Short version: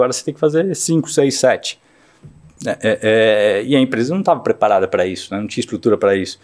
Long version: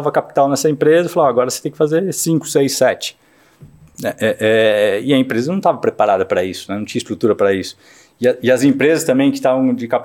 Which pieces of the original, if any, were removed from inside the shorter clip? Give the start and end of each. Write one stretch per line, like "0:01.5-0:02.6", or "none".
none